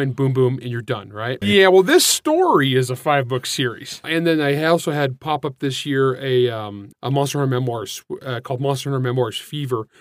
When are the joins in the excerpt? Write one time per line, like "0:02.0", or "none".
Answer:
0:01.4
0:04.0
0:06.9